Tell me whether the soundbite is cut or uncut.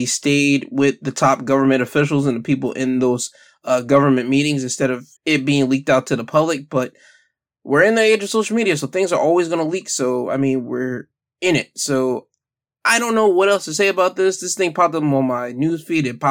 cut